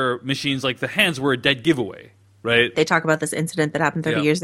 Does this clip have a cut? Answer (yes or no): yes